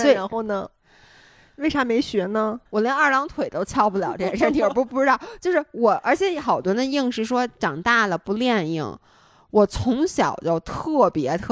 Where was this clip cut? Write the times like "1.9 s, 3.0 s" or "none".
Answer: 2.6 s